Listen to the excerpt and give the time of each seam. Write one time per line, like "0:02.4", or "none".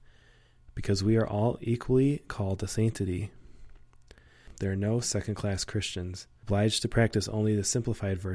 none